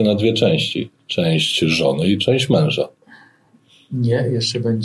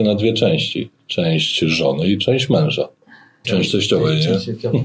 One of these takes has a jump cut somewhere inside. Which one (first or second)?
second